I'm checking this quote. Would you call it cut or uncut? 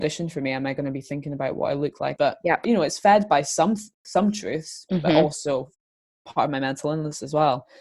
cut